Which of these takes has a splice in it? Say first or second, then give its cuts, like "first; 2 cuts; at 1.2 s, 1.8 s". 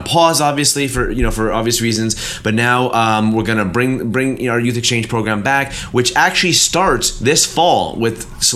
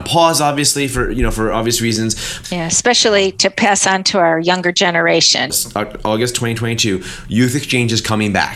second; 2 cuts; at 2.4 s, 5.5 s